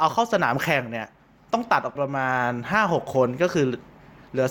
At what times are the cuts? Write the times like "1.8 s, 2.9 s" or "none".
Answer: 2.0 s